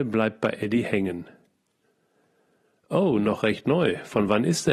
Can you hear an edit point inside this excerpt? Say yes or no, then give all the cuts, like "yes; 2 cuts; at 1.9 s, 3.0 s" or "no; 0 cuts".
no; 0 cuts